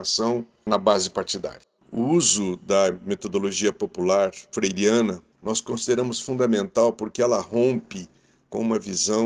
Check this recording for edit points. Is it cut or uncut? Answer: cut